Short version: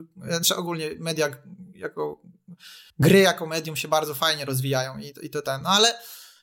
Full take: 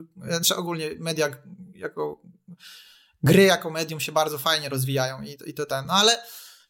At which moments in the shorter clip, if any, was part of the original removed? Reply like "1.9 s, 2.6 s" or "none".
2.9 s